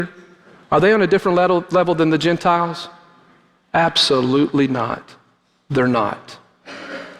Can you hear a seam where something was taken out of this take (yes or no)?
no